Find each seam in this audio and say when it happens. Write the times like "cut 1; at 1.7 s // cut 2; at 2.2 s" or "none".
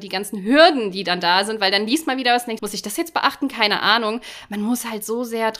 cut 1; at 2.6 s

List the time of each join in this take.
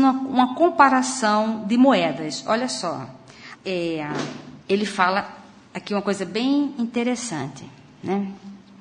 cut 1; at 3.5 s // cut 2; at 4.6 s

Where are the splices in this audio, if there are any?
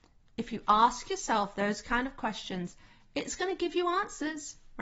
none

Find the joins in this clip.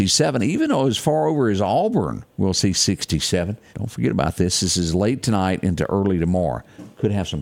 cut 1; at 3.7 s

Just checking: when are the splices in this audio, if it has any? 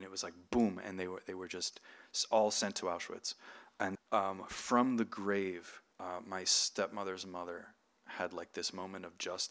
cut 1; at 4.0 s // cut 2; at 5.9 s

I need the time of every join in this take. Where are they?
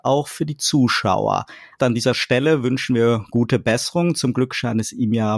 cut 1; at 1.8 s

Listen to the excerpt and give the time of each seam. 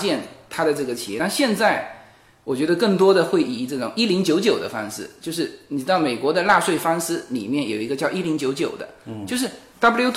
none

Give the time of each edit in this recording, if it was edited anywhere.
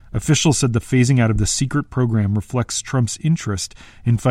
none

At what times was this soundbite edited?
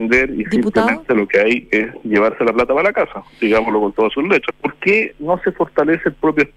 cut 1; at 4.5 s

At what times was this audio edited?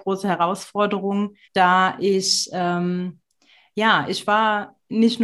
cut 1; at 1.4 s

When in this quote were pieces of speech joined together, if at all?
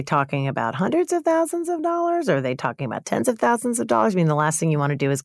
none

